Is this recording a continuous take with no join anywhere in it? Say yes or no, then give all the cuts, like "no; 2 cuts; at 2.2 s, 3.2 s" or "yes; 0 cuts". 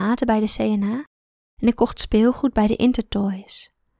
yes; 0 cuts